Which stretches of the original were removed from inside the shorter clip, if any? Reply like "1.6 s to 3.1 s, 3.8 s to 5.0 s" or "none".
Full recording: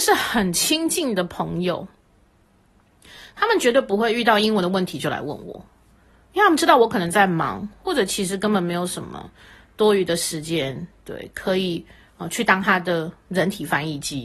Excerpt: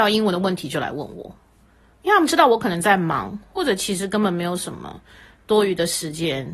none